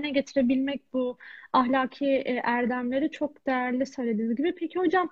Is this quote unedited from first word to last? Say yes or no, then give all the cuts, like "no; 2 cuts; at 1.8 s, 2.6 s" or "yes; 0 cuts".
yes; 0 cuts